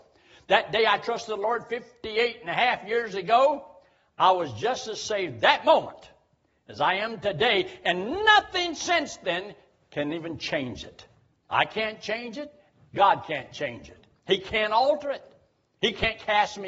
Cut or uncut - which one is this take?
uncut